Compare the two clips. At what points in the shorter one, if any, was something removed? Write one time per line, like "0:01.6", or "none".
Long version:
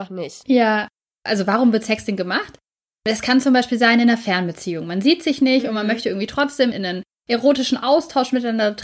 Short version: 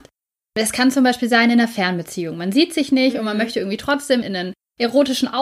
none